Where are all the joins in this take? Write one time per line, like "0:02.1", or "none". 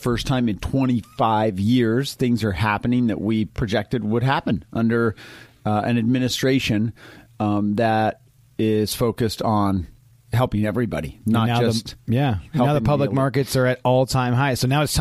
none